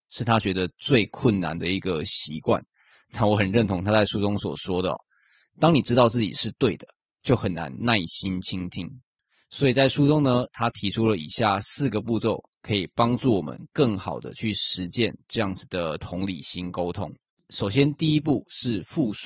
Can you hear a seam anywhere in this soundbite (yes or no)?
no